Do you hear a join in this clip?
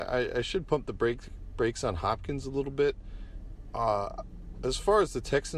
no; 0 cuts

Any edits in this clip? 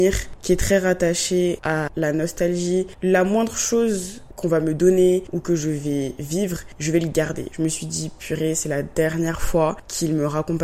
yes; 1 cut; at 7.5 s

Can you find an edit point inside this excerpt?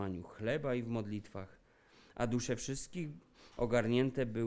no; 0 cuts

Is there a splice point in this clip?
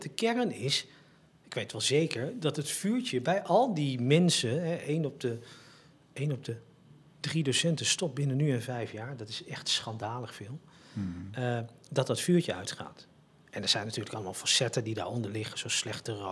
no; 0 cuts

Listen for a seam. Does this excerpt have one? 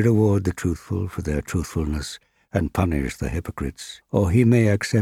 yes; 1 cut; at 4.0 s

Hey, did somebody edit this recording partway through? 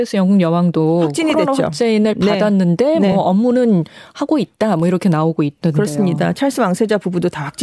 no; 0 cuts

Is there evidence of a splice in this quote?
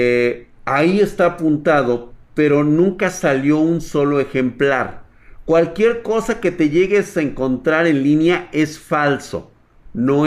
no; 0 cuts

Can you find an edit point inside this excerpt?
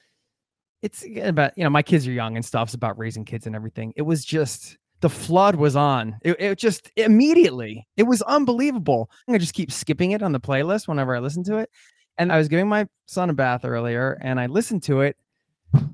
yes; 2 cuts; at 9.3 s, 12.3 s

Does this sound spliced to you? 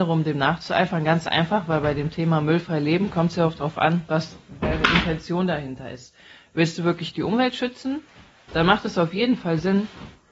no; 0 cuts

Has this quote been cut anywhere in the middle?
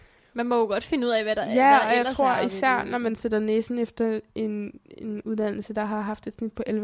no; 0 cuts

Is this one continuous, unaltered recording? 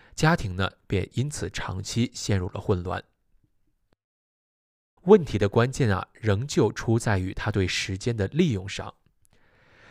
no; 1 cut; at 5.0 s

